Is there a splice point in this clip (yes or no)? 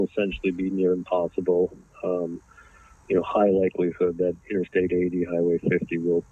no